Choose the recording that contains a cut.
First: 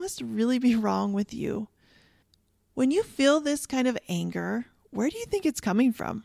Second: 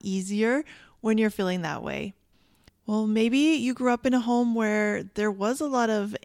second; 1 cut; at 2.7 s

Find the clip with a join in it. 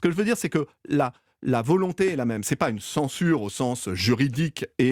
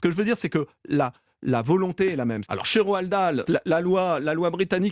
second; 2 cuts; at 2.4 s, 3.5 s

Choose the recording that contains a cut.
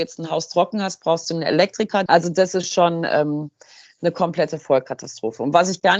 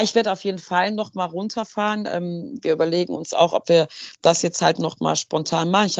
first; 1 cut; at 2.1 s

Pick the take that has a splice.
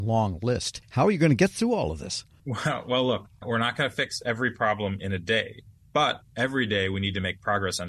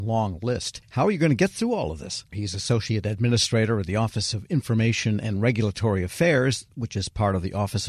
second; 1 cut; at 2.3 s

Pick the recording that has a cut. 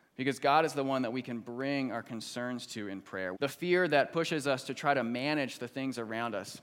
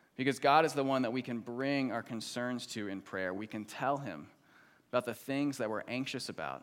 first; 1 cut; at 3.3 s

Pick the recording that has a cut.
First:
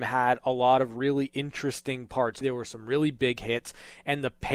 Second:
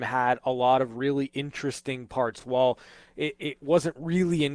first; 1 cut; at 2.4 s

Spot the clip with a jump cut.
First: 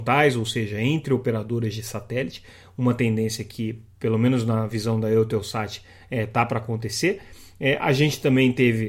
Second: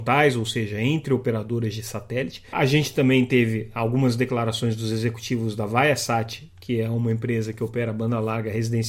second; 1 cut; at 2.5 s

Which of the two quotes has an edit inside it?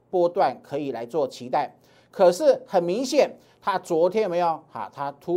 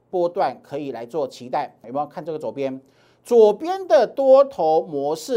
second; 1 cut; at 1.8 s

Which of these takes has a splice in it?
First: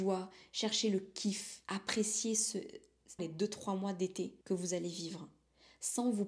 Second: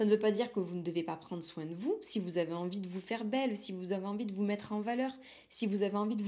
first; 3 cuts; at 1.6 s, 3.2 s, 4.4 s

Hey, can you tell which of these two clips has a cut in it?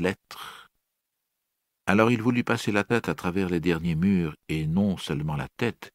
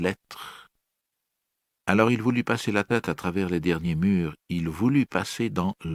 second; 1 cut; at 4.4 s

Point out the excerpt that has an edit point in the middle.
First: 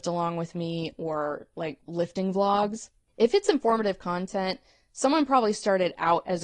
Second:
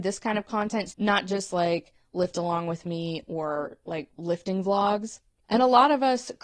second; 2 cuts; at 0.9 s, 5.4 s

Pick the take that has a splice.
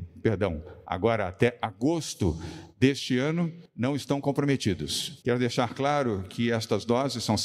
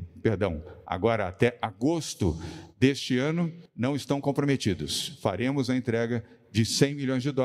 first; 1 cut; at 5.2 s

